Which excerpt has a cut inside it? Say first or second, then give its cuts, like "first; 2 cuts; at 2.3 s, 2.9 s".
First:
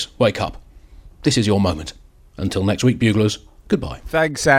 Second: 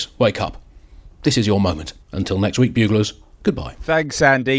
second; 1 cut; at 2.0 s